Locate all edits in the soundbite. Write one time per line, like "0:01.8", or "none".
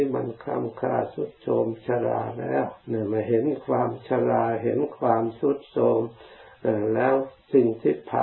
0:02.8